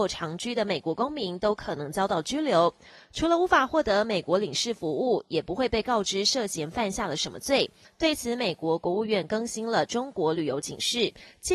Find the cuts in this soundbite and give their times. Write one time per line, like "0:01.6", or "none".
0:07.8